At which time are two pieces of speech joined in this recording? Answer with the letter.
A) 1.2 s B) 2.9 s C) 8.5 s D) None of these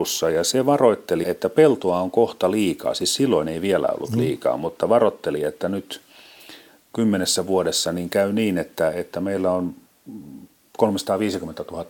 A